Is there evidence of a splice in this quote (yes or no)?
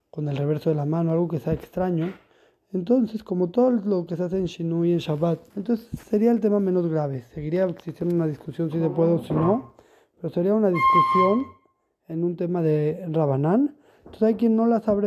yes